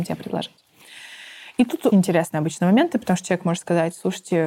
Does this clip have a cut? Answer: yes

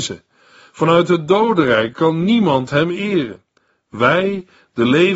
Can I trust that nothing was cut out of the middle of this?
yes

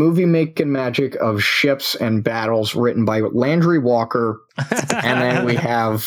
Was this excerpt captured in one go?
no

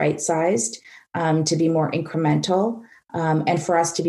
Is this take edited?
no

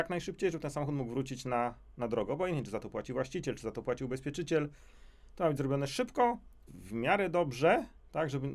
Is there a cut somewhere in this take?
yes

